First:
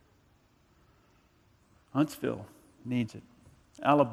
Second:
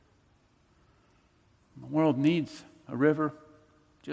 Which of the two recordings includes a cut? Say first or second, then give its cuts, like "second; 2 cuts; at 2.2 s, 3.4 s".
first; 1 cut; at 1.7 s